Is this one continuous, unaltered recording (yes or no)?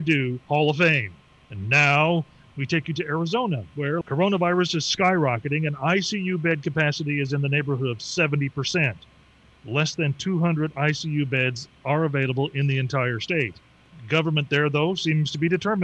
no